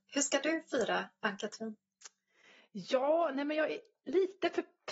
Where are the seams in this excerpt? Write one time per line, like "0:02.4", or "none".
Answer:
none